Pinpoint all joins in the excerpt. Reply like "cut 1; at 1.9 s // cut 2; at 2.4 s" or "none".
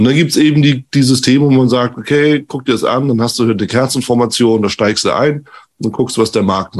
none